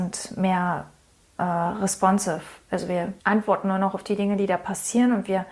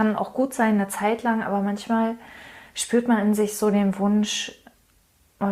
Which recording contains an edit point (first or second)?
first